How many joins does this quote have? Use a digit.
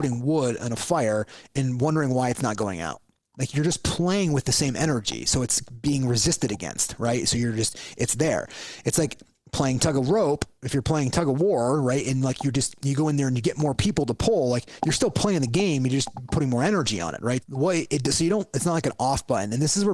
1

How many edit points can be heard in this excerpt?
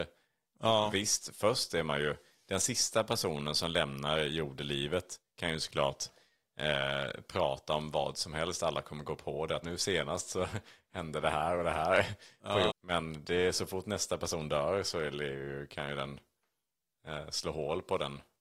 2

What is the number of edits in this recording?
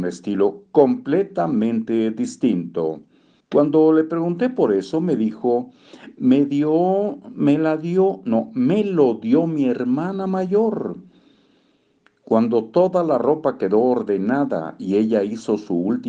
1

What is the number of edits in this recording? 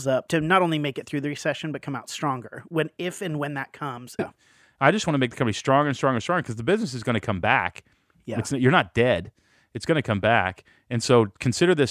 1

